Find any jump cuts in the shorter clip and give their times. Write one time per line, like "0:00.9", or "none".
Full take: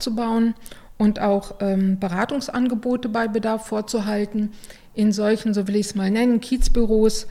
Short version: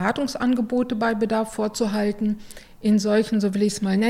none